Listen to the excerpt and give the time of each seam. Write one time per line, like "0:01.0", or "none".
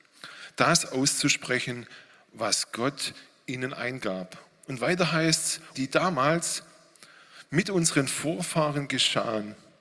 0:05.7